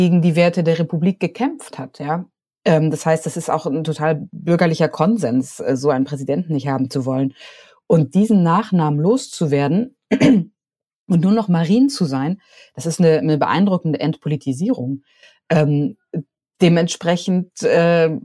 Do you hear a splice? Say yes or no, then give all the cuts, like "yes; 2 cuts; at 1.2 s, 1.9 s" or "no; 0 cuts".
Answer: no; 0 cuts